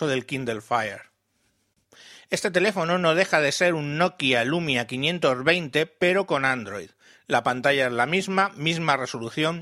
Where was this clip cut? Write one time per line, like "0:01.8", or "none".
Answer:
none